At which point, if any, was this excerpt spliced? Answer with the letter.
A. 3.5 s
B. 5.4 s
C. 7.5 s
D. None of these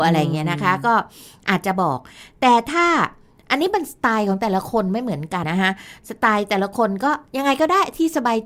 B